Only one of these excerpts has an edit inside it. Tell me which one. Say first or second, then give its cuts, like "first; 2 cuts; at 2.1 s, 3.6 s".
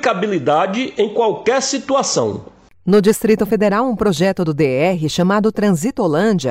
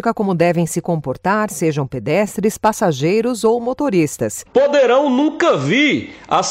second; 1 cut; at 4.5 s